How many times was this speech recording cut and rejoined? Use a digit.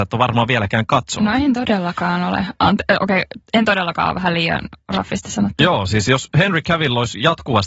0